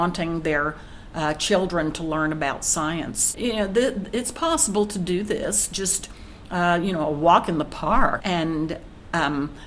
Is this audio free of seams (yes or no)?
no